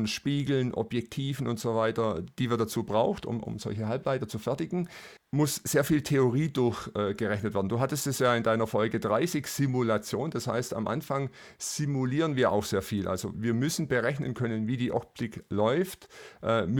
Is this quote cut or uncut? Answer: cut